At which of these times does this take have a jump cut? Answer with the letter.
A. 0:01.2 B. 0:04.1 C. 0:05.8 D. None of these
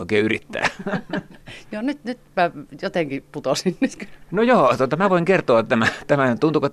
D